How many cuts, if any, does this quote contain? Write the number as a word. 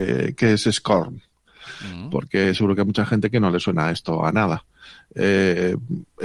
zero